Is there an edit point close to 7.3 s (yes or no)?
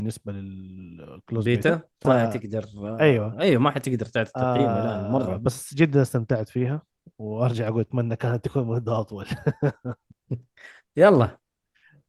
no